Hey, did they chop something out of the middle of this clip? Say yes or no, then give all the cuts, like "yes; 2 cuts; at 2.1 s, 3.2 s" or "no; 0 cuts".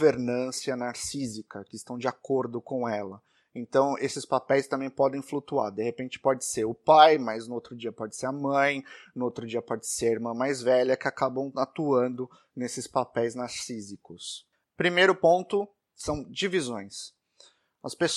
yes; 1 cut; at 14.6 s